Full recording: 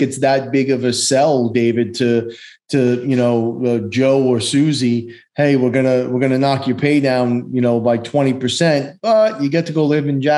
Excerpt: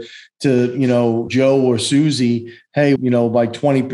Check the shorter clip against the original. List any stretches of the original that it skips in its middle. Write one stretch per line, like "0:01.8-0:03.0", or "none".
0:03.6-0:03.9
0:05.6-0:07.5